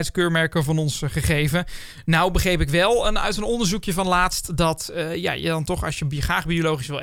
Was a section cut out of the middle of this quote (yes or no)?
no